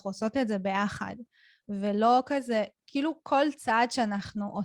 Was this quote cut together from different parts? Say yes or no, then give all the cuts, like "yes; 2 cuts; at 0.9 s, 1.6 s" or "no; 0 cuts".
no; 0 cuts